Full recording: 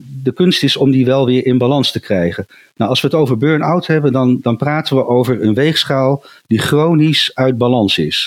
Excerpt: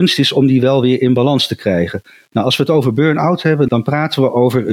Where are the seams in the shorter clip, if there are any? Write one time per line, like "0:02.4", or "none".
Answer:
0:03.7